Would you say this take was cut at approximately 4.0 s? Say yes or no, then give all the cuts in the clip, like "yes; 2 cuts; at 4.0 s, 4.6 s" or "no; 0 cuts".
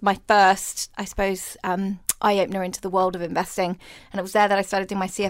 yes; 2 cuts; at 0.9 s, 4.0 s